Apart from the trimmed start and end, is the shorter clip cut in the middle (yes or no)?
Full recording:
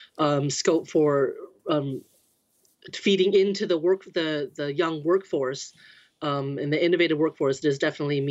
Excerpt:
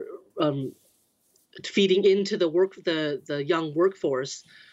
no